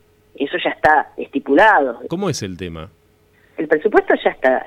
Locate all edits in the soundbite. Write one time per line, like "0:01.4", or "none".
0:02.1